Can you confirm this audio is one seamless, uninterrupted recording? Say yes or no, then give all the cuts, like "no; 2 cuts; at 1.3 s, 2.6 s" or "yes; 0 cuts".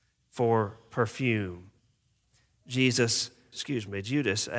no; 1 cut; at 3.5 s